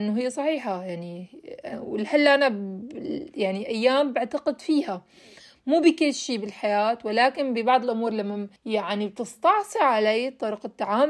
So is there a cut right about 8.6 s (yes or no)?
yes